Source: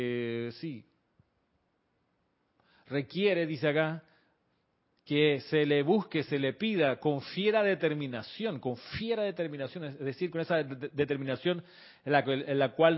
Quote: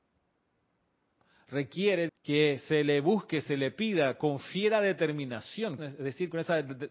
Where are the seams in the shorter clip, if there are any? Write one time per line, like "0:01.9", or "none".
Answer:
0:02.1
0:05.8